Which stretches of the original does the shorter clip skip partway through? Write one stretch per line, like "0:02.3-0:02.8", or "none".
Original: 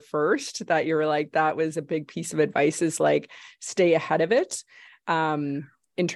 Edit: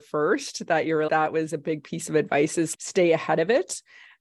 0:01.1-0:01.3
0:03.0-0:03.6